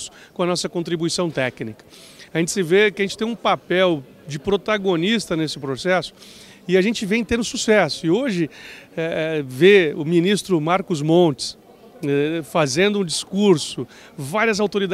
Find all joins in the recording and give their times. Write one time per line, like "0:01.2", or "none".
none

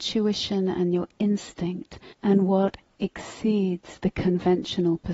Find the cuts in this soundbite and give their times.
0:02.1

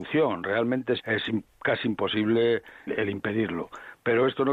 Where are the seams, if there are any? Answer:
0:01.0
0:02.9

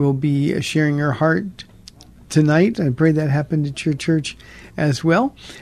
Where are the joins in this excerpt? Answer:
0:02.7

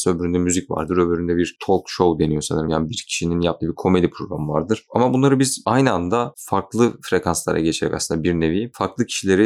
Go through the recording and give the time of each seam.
none

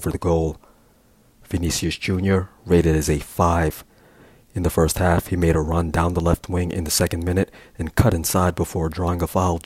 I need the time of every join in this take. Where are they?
none

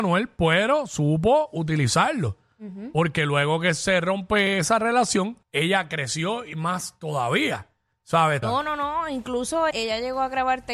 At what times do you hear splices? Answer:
0:05.4
0:08.4
0:09.7

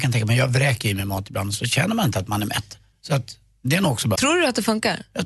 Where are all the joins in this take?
0:02.9
0:04.2

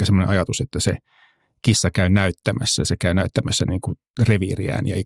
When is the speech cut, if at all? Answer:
none

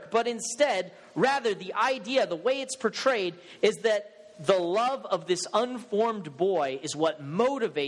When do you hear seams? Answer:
none

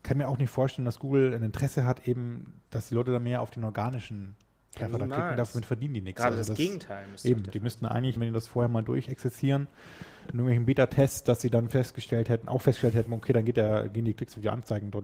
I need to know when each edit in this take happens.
0:08.2
0:13.1

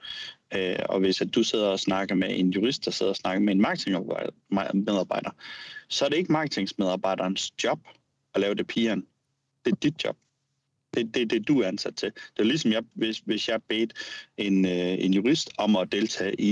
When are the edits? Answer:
0:12.9

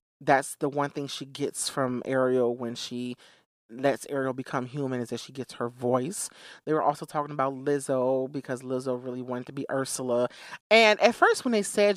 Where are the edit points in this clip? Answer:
0:06.6
0:10.6

